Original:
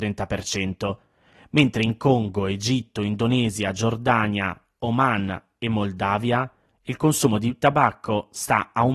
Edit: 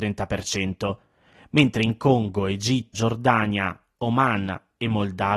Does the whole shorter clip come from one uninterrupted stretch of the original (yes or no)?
no